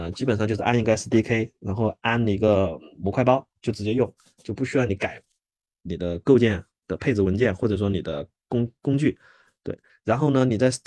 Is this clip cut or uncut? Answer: cut